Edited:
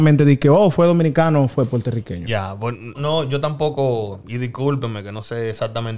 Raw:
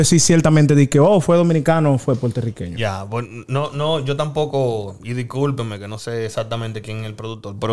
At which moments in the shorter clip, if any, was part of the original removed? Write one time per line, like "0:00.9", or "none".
0:02.9